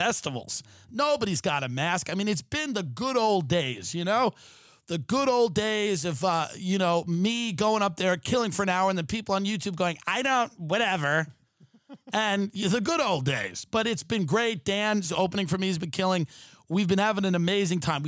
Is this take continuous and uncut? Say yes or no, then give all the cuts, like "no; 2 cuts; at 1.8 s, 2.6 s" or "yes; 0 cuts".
yes; 0 cuts